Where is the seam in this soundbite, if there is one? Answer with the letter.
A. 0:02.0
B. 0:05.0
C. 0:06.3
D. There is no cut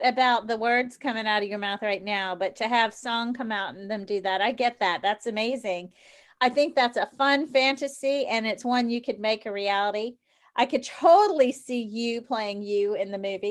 D